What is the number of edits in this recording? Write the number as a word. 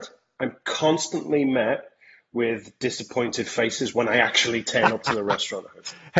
zero